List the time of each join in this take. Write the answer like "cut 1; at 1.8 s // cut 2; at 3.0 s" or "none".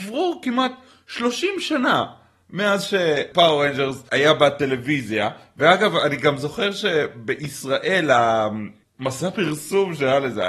none